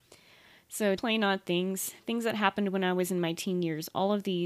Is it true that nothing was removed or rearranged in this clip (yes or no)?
no